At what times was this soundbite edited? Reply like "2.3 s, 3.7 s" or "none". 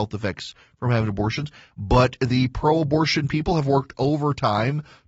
none